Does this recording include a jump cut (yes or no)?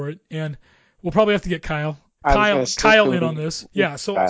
yes